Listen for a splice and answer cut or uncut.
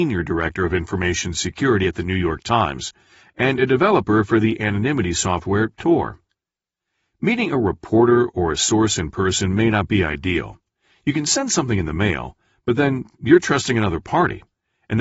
uncut